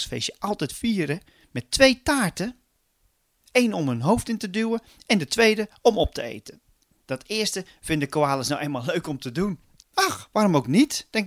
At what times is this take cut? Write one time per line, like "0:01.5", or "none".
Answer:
0:09.8